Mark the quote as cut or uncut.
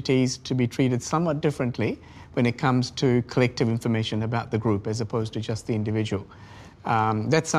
uncut